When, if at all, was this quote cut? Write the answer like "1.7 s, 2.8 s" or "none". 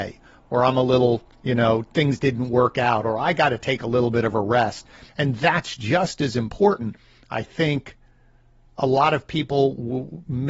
5.1 s